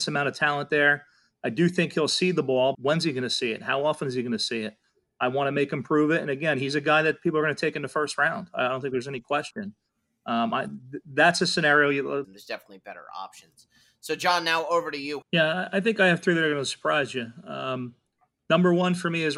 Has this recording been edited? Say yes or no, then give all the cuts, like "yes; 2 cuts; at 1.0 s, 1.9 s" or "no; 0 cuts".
yes; 3 cuts; at 2.7 s, 12.2 s, 15.2 s